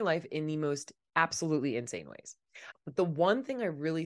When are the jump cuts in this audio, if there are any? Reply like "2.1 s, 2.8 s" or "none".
2.7 s